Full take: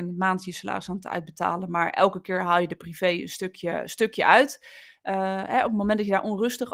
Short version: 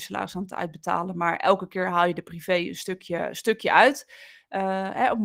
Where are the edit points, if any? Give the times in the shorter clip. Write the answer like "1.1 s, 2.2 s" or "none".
none